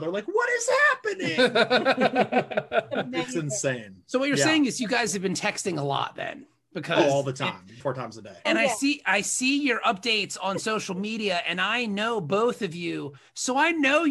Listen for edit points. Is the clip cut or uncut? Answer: cut